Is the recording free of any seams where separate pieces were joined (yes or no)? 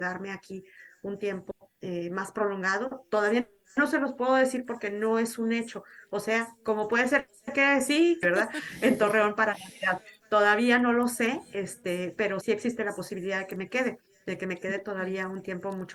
no